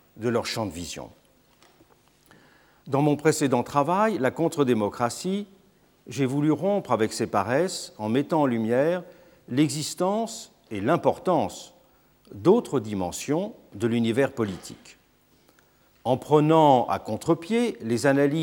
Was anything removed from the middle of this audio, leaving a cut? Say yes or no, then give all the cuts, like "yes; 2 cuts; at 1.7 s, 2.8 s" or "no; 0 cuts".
no; 0 cuts